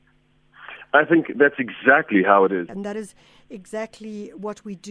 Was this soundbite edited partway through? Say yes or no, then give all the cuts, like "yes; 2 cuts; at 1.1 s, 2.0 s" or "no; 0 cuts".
yes; 1 cut; at 2.7 s